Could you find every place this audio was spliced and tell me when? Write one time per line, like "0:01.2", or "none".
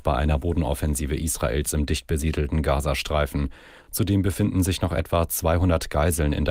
none